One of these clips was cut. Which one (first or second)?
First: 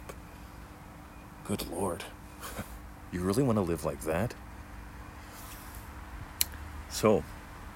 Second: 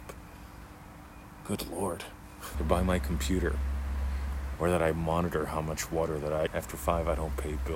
second